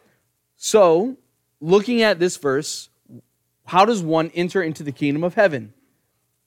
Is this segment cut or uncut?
uncut